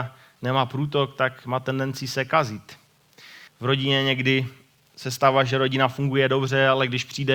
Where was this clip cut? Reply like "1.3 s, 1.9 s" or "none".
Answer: 3.5 s